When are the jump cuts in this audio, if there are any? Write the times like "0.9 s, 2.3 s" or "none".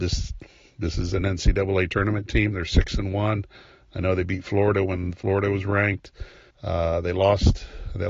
6.5 s